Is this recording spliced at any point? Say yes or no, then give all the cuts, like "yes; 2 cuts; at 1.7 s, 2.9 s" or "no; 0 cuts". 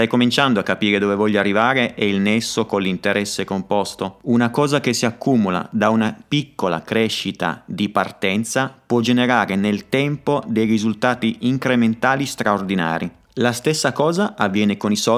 no; 0 cuts